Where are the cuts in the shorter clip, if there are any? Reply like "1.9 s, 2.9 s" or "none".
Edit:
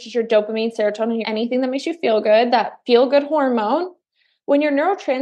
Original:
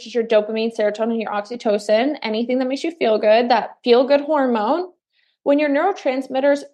1.2 s